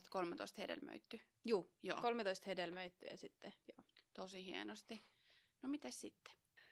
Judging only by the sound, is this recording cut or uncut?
uncut